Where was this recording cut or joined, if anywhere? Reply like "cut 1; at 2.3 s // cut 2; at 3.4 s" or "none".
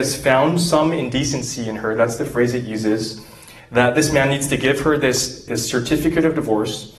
cut 1; at 5.5 s